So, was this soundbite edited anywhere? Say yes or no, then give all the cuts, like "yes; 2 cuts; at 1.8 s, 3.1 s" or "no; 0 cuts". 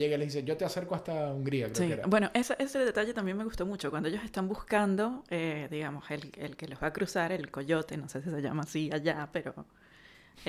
no; 0 cuts